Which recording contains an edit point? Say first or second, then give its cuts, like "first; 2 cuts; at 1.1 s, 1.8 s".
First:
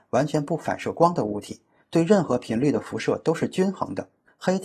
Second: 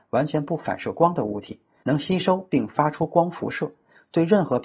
first; 1 cut; at 1.8 s